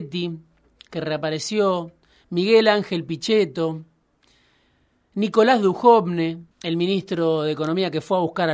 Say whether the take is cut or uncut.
cut